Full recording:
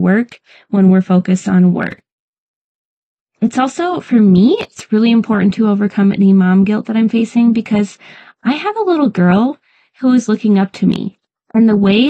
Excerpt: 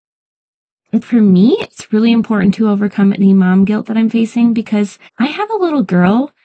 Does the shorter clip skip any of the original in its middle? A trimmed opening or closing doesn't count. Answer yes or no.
yes